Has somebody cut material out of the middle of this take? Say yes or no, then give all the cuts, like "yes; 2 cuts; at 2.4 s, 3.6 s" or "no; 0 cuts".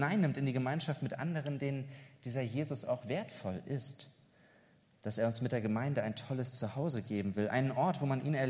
no; 0 cuts